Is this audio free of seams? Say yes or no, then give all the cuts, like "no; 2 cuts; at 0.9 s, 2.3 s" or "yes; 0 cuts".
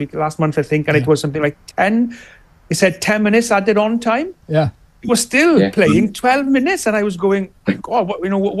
yes; 0 cuts